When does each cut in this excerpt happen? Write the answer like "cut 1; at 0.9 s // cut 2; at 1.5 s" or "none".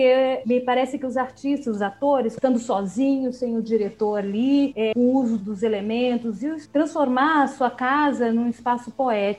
cut 1; at 2.4 s // cut 2; at 4.9 s

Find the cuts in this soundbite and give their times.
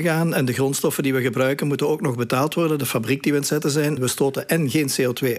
cut 1; at 4.0 s

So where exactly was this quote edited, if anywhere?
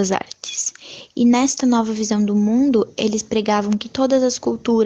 none

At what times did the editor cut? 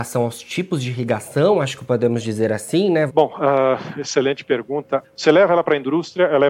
cut 1; at 3.1 s // cut 2; at 5.0 s

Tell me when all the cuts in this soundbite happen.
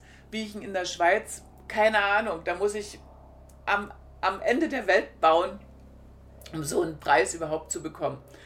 none

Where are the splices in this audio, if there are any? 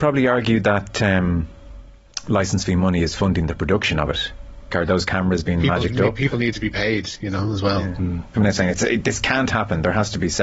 cut 1; at 4.7 s // cut 2; at 8.3 s

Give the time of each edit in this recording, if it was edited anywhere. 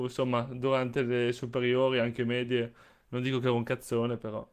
none

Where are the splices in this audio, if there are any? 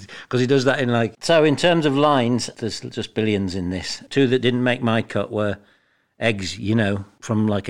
cut 1; at 1.1 s // cut 2; at 4.1 s

